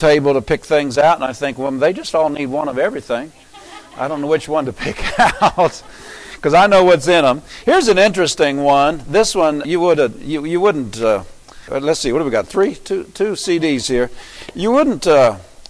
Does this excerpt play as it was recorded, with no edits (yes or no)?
no